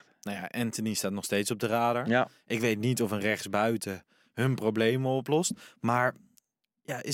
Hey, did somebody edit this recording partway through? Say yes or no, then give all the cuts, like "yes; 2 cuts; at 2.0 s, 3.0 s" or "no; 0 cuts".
no; 0 cuts